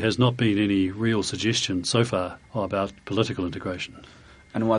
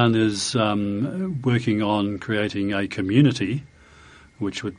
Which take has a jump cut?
first; 1 cut; at 2.4 s

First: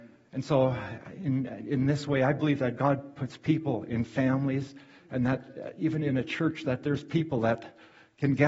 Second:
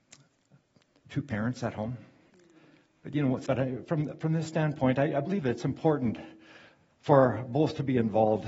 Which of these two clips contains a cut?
second; 1 cut; at 3.5 s

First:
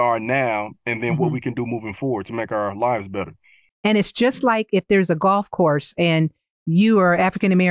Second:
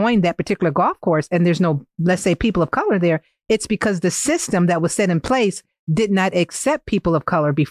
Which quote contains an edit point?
first; 1 cut; at 3.7 s

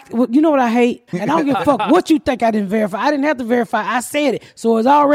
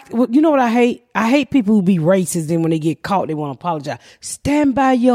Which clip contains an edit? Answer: first; 1 cut; at 1.1 s

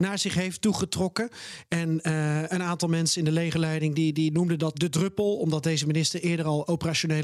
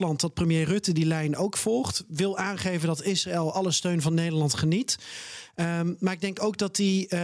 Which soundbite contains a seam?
first; 1 cut; at 4.7 s

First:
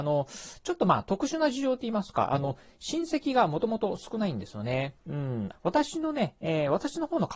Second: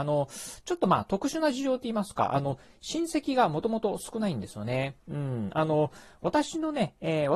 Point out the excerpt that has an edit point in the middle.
first; 1 cut; at 5.5 s

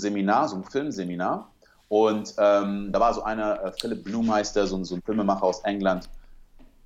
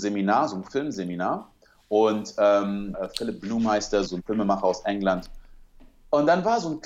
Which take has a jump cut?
second; 2 cuts; at 2.9 s, 4.1 s

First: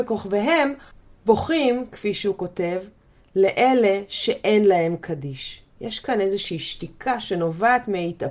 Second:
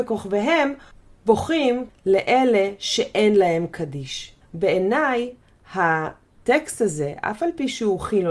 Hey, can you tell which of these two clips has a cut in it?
second; 2 cuts; at 1.9 s, 4.4 s

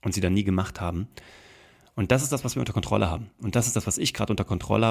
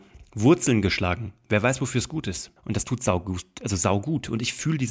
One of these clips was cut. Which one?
second; 1 cut; at 2.6 s

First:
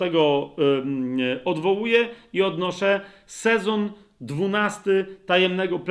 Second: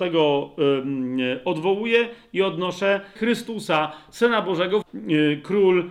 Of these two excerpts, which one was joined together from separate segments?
second; 2 cuts; at 3.2 s, 4.8 s

